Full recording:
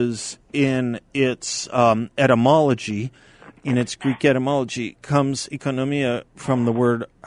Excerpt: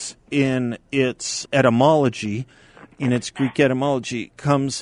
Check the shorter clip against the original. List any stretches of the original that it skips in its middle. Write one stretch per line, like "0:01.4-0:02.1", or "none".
0:01.7-0:02.1